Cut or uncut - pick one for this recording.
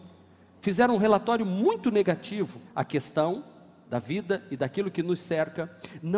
cut